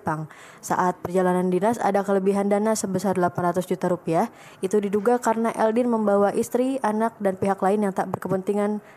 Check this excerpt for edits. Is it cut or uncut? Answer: uncut